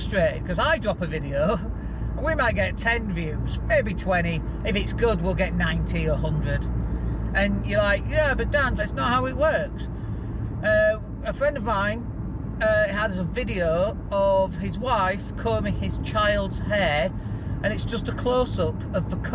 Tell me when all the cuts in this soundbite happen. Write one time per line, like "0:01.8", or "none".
0:08.8